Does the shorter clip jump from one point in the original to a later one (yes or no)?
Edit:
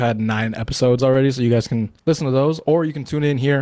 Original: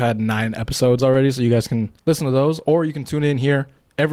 no